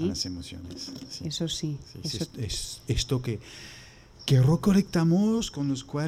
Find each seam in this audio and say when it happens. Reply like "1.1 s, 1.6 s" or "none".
none